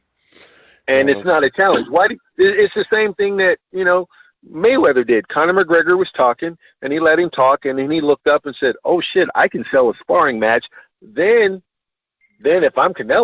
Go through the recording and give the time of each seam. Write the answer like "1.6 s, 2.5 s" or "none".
10.9 s